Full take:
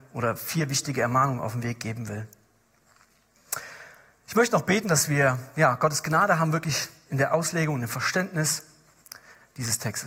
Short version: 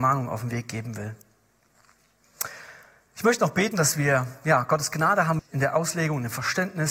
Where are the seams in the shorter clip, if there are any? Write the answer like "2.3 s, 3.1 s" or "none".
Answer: 5.4 s